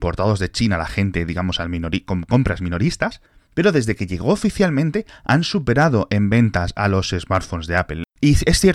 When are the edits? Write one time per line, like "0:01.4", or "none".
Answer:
none